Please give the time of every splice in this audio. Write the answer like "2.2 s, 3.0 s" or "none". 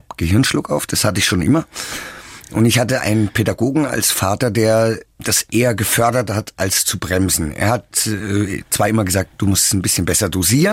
none